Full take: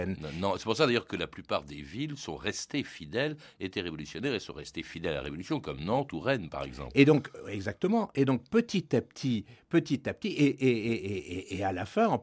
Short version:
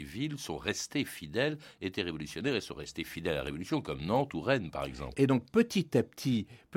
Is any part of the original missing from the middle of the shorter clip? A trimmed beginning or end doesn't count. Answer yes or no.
yes